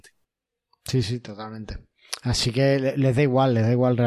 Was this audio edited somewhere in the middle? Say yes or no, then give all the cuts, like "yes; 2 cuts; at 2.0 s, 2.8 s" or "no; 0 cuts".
yes; 1 cut; at 1.0 s